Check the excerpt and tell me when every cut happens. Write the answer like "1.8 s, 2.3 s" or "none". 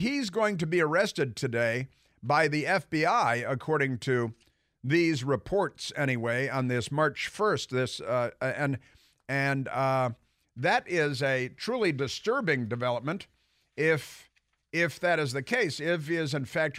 none

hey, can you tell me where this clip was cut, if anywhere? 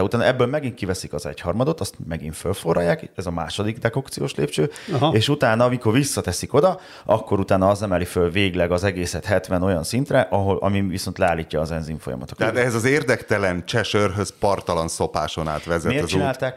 none

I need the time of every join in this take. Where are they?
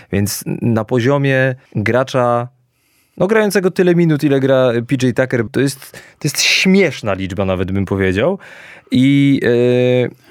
1.7 s, 5.5 s

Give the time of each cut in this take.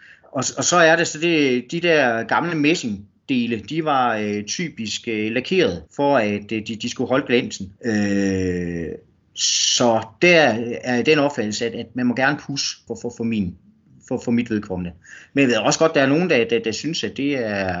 5.9 s, 7.8 s, 12.9 s

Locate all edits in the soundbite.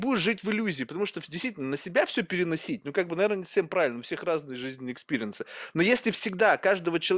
none

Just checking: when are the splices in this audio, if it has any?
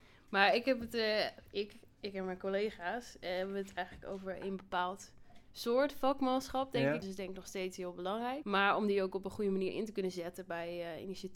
7.0 s, 8.4 s

